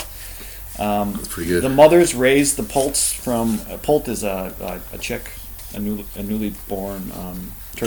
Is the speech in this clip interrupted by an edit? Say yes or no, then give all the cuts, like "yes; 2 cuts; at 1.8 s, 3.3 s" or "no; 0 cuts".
no; 0 cuts